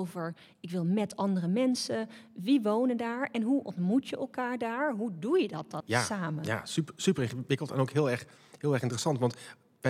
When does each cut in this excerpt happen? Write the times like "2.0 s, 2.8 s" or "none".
5.8 s